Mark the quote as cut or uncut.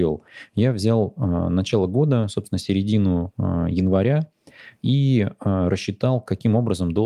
uncut